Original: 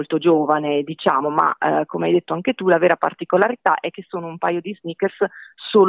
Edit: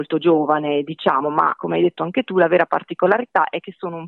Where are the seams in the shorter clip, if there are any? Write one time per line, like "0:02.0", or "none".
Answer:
0:01.6